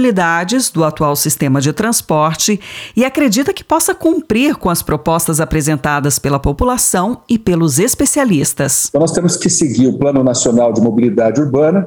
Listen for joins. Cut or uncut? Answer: uncut